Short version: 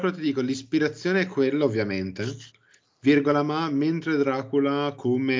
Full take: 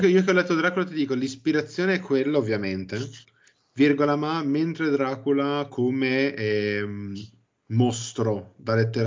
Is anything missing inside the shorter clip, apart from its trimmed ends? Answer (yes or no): no